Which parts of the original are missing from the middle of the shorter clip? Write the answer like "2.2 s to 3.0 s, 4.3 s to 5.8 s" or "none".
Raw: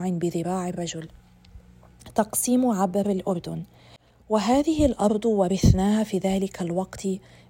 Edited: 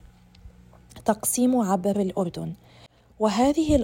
none